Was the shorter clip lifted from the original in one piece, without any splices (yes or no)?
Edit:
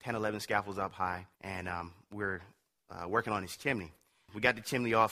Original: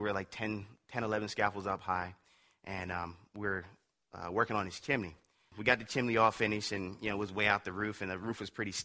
no